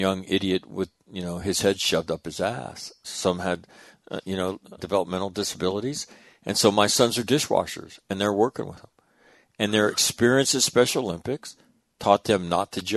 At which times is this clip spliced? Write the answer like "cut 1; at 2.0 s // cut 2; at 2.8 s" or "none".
cut 1; at 3.0 s // cut 2; at 4.8 s